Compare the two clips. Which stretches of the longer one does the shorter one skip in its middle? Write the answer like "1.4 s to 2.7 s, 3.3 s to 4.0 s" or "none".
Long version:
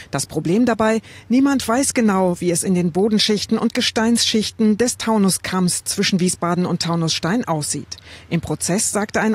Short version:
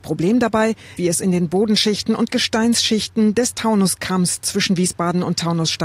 1.2 s to 2.4 s